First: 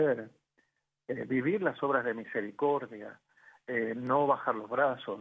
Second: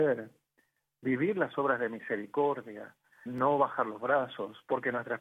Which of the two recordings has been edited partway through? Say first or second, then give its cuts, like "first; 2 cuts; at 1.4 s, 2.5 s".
second; 2 cuts; at 1.0 s, 3.3 s